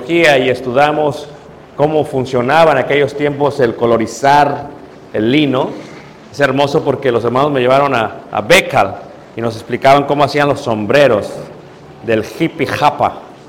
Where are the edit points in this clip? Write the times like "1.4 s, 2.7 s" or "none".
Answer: none

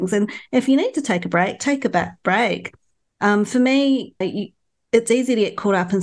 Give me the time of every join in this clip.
4.2 s

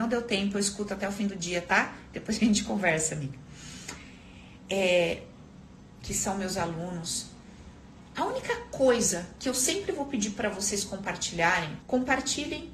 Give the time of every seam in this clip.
6.0 s, 11.8 s

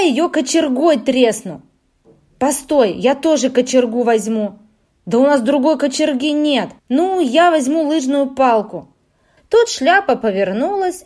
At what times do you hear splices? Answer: 6.8 s, 9.4 s

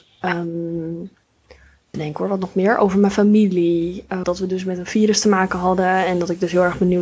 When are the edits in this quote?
1.9 s, 4.2 s

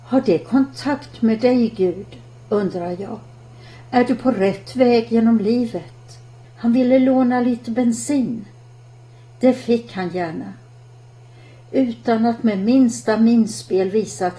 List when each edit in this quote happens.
6.4 s

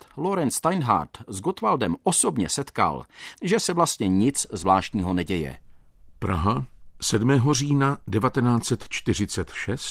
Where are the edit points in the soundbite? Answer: 3.3 s

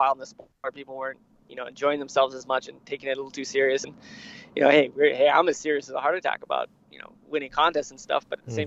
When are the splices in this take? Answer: none

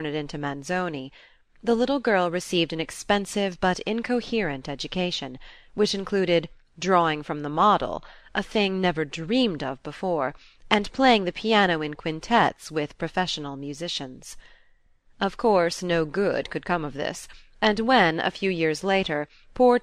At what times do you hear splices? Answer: none

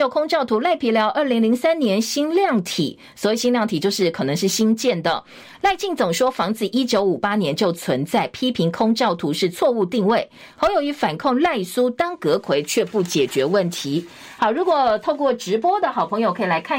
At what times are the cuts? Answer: none

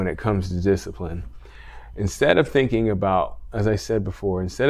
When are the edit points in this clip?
none

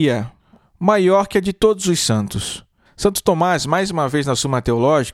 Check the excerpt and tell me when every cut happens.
2.9 s

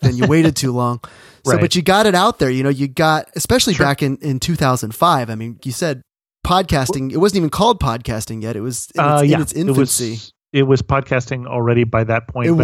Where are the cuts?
5.6 s

